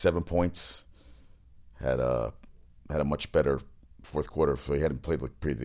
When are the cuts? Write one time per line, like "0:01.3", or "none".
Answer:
none